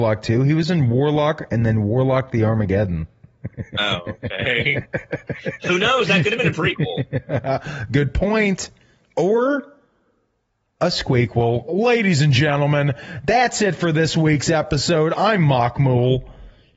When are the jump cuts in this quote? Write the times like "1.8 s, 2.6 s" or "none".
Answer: none